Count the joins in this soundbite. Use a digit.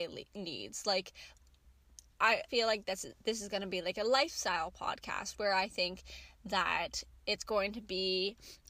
1